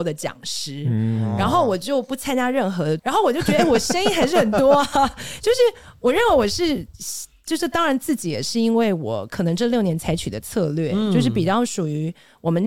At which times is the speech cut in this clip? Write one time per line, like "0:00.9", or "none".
0:03.0